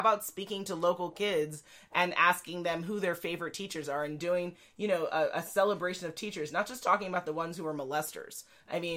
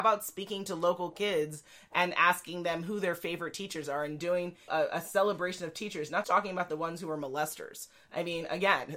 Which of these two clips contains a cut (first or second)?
second